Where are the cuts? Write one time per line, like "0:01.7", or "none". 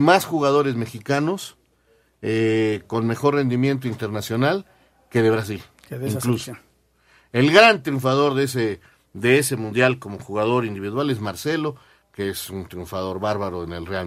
none